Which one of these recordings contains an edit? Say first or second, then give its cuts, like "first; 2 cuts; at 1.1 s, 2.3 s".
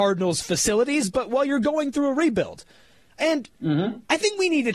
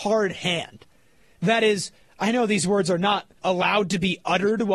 second; 2 cuts; at 1.4 s, 3.4 s